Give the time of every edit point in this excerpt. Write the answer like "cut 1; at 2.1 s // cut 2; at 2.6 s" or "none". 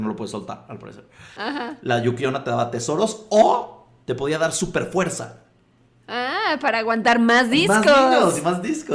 cut 1; at 1.4 s

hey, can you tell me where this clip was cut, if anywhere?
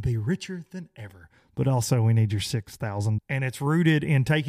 cut 1; at 3.2 s

